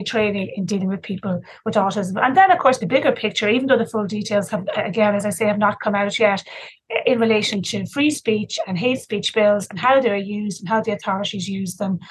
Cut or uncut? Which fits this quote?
cut